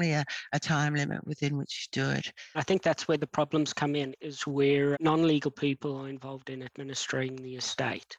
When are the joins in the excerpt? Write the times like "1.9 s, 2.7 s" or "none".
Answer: 4.9 s